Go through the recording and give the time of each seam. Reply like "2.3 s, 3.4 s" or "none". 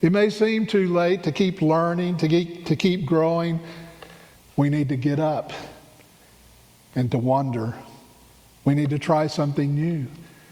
4.5 s